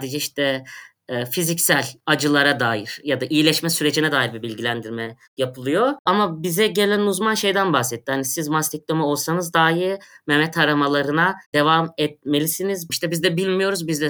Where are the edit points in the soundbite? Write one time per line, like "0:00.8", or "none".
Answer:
0:12.9